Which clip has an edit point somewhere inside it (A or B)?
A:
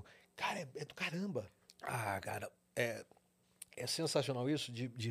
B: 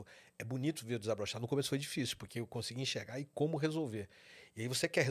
A